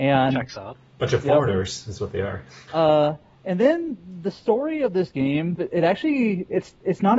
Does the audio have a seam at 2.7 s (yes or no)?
yes